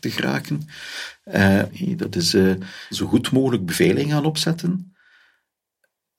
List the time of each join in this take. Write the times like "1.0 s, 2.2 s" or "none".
1.7 s, 2.9 s